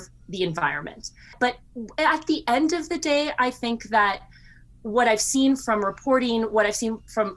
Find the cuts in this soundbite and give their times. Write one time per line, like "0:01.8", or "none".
0:01.4